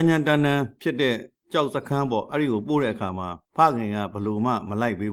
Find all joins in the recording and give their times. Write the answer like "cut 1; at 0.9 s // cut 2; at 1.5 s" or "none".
cut 1; at 3.5 s